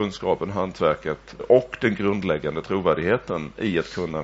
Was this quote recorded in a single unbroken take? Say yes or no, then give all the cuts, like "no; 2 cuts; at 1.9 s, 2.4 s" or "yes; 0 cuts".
no; 1 cut; at 1.4 s